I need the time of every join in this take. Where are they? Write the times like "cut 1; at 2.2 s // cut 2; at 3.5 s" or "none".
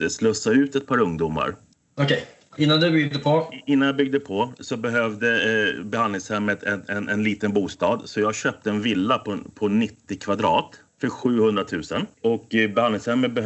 none